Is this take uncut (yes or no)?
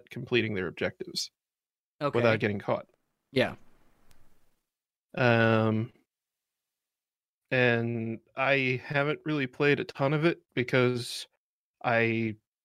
yes